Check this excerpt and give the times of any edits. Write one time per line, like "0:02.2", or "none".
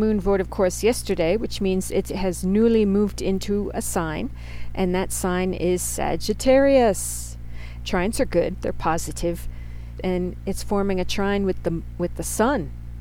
0:07.8
0:10.0